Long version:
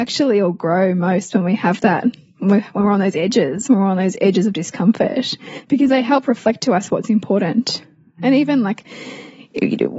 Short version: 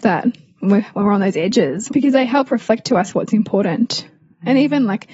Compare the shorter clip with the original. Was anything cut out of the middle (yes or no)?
yes